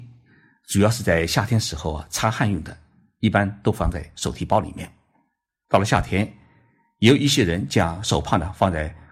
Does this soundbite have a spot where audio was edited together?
yes; 1 cut; at 5.6 s

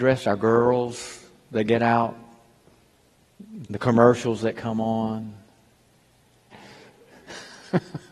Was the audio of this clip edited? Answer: yes; 2 cuts; at 3.6 s, 6.5 s

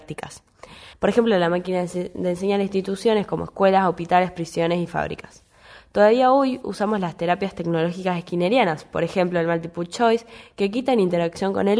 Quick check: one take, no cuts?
no; 1 cut; at 0.9 s

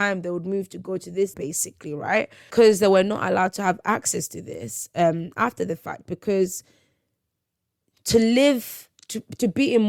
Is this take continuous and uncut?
no; 1 cut; at 1.3 s

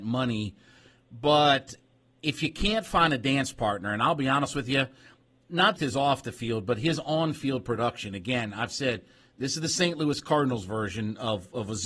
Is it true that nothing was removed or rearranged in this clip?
no; 1 cut; at 5.8 s

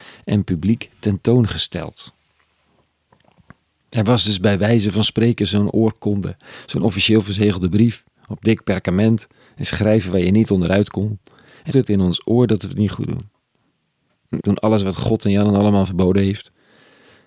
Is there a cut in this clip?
yes; 2 cuts; at 11.7 s, 14.4 s

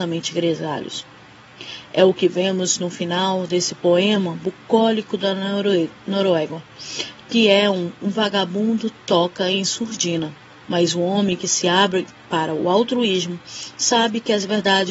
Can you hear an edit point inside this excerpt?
yes; 1 cut; at 10.6 s

